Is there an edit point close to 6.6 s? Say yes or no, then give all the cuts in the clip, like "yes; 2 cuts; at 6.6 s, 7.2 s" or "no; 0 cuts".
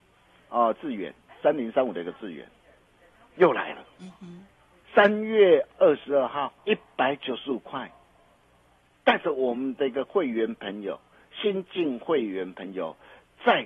yes; 1 cut; at 6.6 s